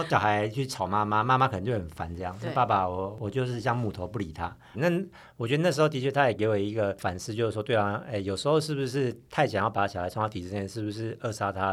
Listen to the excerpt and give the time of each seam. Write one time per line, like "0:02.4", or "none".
0:04.7